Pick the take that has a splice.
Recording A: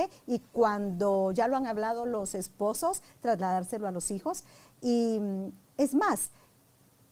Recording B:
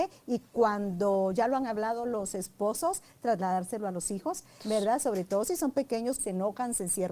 B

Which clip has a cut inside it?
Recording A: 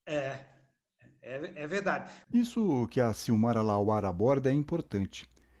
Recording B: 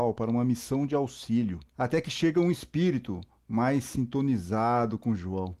B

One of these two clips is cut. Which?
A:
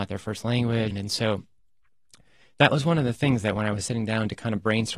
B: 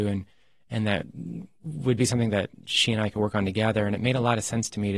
A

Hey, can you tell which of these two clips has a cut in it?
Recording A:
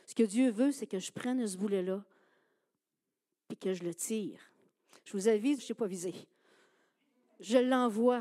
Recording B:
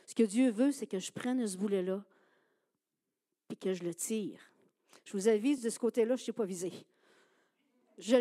A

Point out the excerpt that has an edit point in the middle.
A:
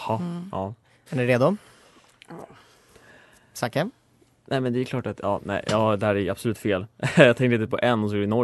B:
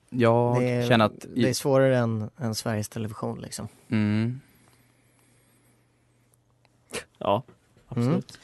A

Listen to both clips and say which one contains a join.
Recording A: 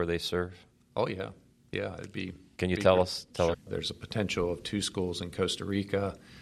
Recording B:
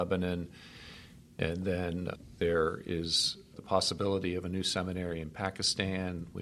A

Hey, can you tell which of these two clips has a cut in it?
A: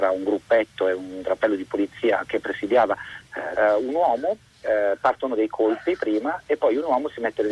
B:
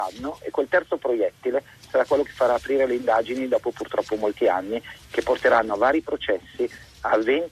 A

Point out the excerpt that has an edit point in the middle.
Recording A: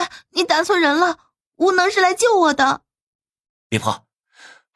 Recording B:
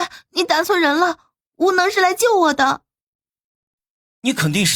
A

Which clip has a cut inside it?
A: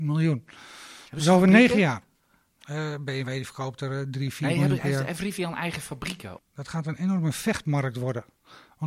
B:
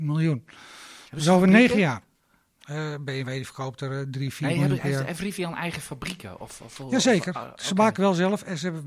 A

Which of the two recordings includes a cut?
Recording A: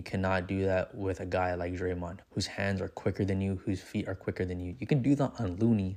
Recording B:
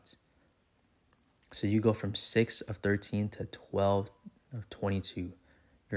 A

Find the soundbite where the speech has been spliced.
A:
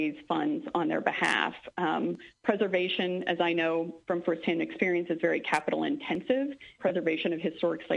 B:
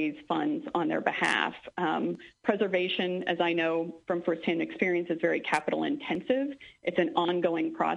A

